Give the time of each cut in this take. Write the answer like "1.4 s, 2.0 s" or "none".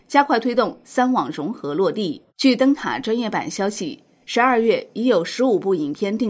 2.3 s